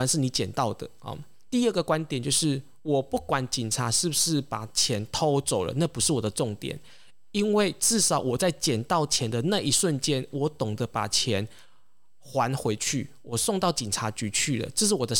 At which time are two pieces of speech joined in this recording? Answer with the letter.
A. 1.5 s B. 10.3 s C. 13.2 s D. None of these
A